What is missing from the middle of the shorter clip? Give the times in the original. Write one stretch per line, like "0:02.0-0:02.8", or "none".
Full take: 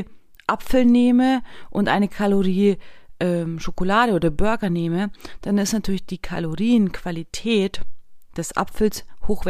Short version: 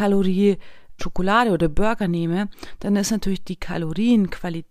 0:03.2-0:03.6